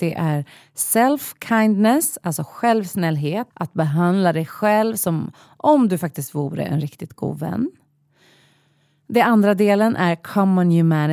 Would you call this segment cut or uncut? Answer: cut